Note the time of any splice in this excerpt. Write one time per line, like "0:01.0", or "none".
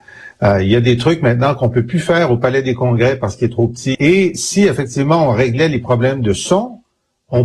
0:03.9